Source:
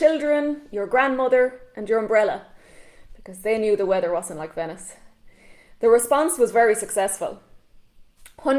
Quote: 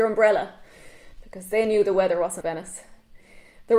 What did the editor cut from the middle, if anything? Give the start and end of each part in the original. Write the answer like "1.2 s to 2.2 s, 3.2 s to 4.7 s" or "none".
4.3 s to 4.5 s